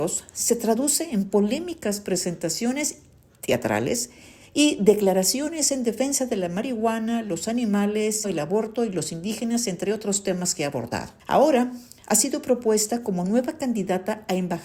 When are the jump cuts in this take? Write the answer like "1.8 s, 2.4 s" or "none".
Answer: 8.2 s, 11.2 s